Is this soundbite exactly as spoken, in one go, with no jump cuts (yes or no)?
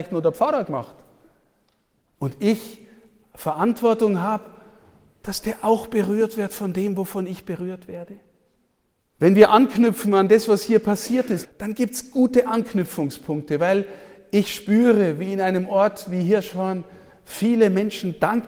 no